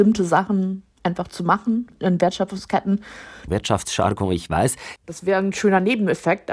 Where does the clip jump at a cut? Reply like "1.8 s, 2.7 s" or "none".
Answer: 3.5 s, 5.0 s